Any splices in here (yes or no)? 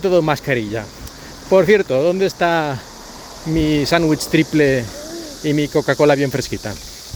no